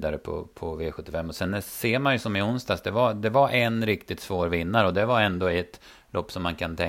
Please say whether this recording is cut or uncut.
uncut